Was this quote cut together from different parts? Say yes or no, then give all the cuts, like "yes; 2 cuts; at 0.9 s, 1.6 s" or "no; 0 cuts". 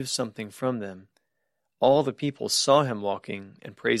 yes; 1 cut; at 1.6 s